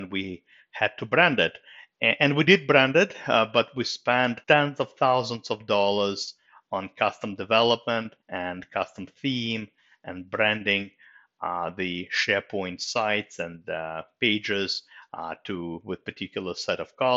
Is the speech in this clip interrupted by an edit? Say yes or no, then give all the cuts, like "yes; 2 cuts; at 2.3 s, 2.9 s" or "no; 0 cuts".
yes; 2 cuts; at 4.4 s, 8.2 s